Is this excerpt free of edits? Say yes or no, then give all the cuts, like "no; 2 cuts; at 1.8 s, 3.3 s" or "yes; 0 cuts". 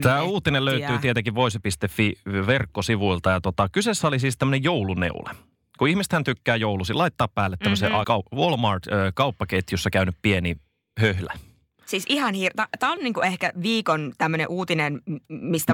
no; 1 cut; at 8.0 s